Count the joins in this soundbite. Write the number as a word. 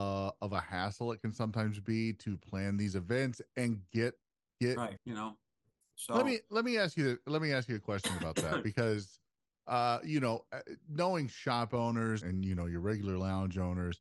two